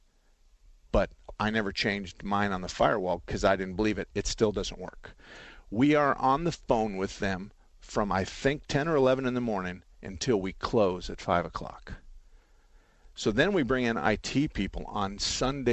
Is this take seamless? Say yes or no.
no